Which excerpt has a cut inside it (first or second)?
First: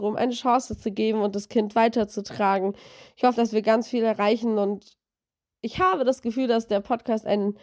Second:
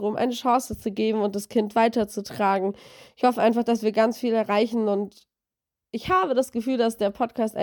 first